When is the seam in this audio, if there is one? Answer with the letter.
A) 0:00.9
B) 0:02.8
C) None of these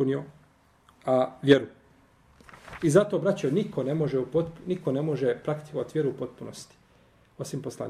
A